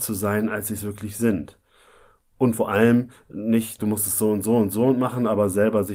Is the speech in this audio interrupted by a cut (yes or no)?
yes